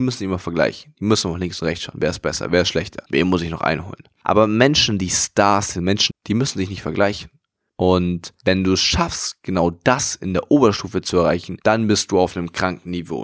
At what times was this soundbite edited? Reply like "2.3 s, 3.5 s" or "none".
6.1 s

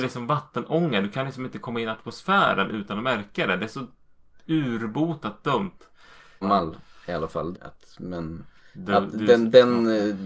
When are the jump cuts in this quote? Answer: 6.4 s, 7.5 s

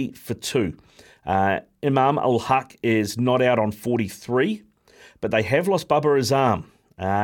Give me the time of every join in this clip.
none

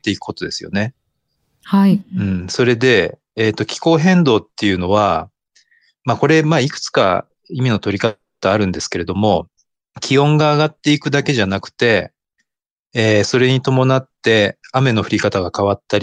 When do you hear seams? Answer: none

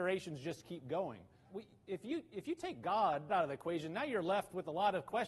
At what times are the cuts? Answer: 1.5 s, 3.3 s

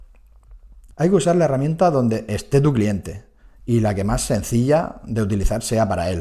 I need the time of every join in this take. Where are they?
0.9 s

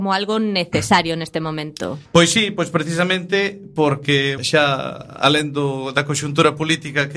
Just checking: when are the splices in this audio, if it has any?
2.1 s, 4.4 s

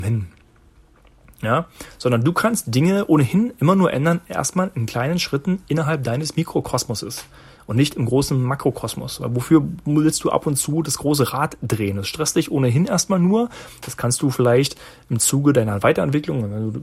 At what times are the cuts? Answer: none

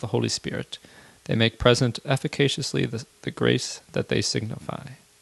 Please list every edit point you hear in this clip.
none

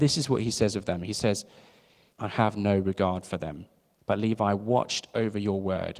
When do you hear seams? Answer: 2.1 s, 4.0 s

